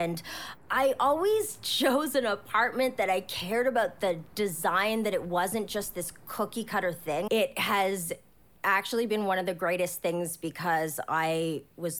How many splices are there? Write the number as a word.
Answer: one